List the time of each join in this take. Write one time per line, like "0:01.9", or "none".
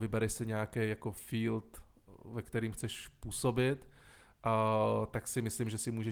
none